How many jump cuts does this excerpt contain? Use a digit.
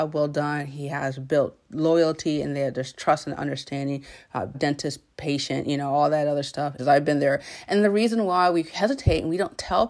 2